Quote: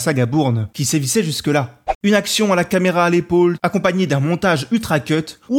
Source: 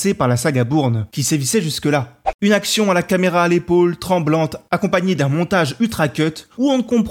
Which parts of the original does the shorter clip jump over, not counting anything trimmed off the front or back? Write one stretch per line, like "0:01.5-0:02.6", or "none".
0:04.0-0:04.7